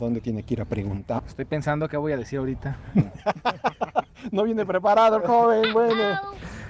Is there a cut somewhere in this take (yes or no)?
yes